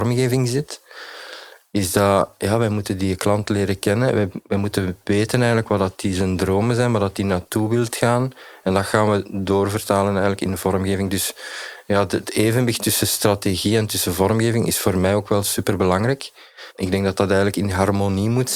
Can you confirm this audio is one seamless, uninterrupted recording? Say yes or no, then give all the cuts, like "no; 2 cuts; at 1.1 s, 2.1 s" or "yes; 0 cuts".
yes; 0 cuts